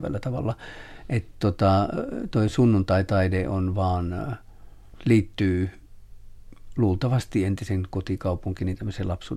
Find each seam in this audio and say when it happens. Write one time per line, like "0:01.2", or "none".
none